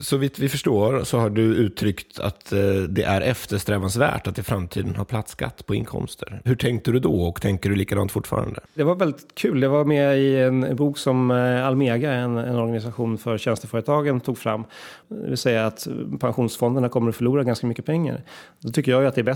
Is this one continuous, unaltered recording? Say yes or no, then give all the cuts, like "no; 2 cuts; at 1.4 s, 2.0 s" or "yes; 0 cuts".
no; 2 cuts; at 8.7 s, 15.0 s